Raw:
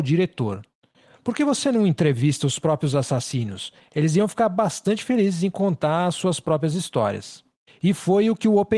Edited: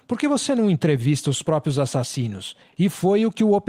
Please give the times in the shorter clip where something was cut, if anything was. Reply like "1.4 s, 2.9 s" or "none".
2.7 s